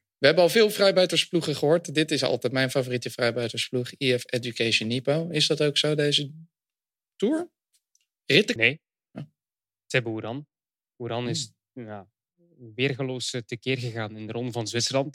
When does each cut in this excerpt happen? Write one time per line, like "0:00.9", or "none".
0:08.6